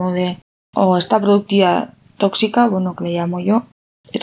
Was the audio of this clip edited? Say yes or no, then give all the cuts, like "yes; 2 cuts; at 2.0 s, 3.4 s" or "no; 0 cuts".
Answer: no; 0 cuts